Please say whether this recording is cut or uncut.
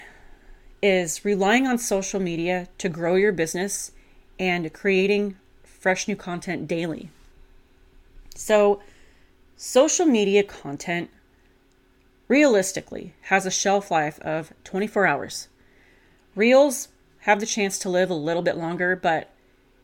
uncut